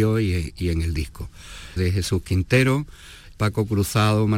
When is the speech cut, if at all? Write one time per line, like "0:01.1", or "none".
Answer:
0:01.8
0:03.3